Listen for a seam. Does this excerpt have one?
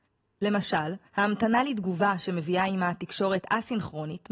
yes; 1 cut; at 1.1 s

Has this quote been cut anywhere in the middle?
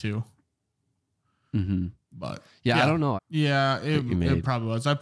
yes; 1 cut; at 3.2 s

